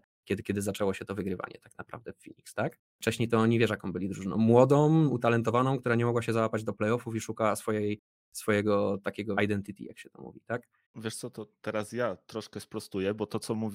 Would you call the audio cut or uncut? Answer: cut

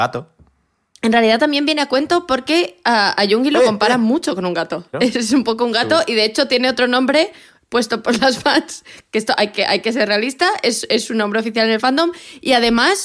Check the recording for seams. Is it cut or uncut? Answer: cut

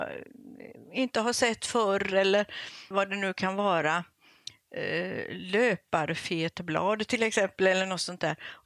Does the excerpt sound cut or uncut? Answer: cut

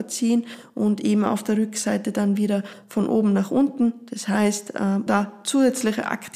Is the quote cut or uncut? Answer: cut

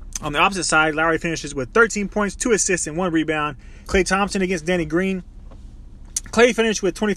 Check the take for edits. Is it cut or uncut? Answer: cut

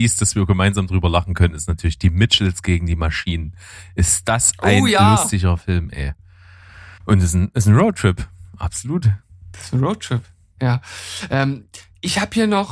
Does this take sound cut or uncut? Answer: cut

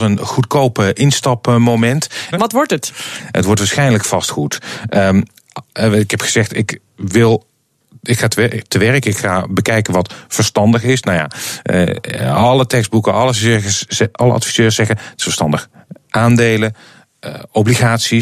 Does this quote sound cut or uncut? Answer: cut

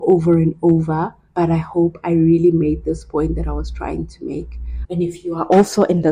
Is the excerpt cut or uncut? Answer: cut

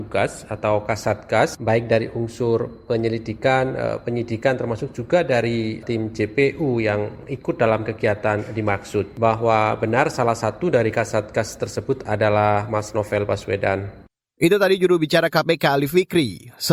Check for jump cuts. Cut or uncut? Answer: uncut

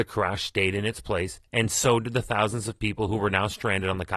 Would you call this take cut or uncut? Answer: uncut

